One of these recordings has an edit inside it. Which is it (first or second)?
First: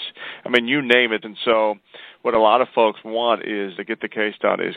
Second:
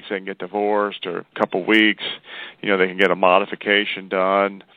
first